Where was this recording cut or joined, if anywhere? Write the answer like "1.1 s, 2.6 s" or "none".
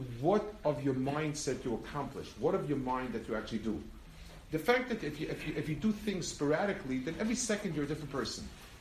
none